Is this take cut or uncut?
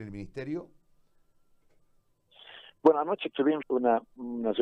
cut